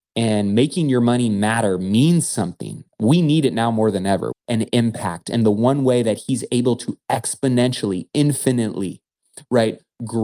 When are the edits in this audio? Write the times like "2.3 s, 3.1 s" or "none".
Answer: 4.3 s